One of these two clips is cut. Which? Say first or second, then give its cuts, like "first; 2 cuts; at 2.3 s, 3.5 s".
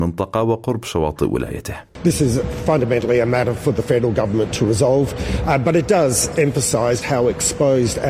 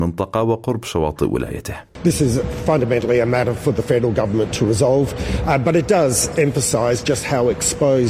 first; 1 cut; at 7.0 s